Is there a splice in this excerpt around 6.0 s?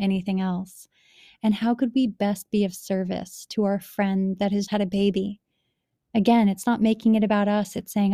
no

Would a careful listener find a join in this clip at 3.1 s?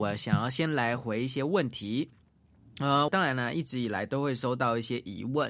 yes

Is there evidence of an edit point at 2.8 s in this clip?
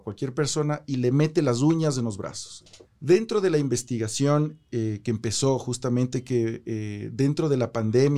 yes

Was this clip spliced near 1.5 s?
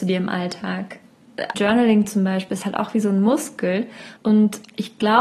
yes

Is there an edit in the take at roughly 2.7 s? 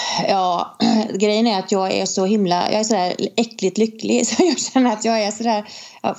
no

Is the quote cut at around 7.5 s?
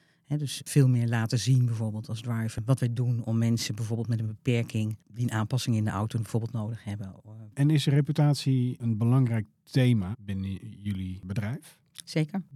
yes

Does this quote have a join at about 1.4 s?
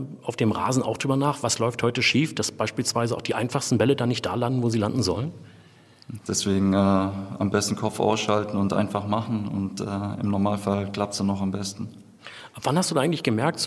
no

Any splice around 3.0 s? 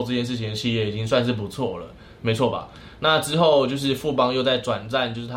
no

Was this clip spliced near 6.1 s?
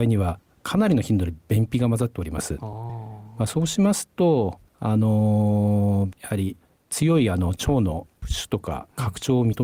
yes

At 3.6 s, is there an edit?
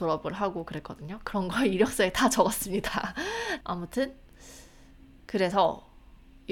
yes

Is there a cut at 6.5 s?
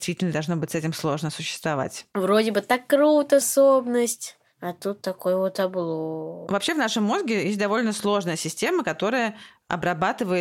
no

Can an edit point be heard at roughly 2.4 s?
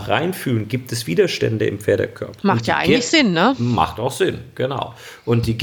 yes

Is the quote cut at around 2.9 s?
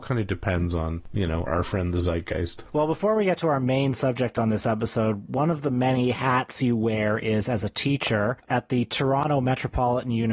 no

